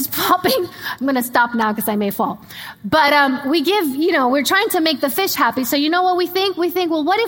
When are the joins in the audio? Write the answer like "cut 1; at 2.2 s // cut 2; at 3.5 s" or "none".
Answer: none